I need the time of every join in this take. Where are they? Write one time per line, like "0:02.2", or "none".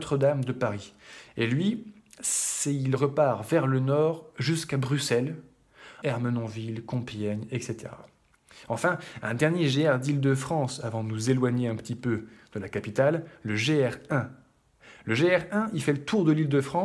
0:06.0